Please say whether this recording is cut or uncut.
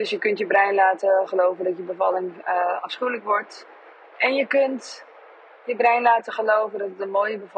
cut